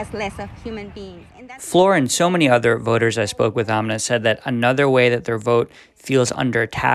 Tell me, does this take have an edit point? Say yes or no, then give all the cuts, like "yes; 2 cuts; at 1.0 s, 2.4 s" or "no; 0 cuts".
no; 0 cuts